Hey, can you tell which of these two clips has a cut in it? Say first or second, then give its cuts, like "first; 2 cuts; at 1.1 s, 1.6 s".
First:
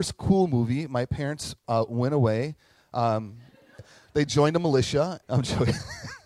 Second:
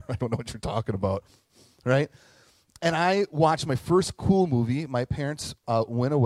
first; 2 cuts; at 3.8 s, 5.2 s